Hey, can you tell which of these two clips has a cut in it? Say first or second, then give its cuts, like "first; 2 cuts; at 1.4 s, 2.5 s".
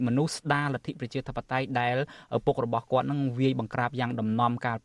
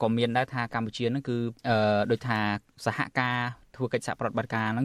second; 1 cut; at 1.6 s